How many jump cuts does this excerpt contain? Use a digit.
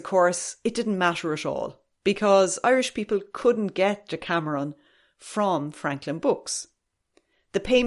0